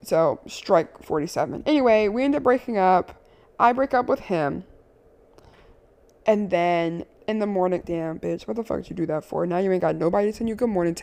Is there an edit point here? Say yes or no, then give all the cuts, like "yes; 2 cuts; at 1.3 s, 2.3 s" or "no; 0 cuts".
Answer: yes; 1 cut; at 7.8 s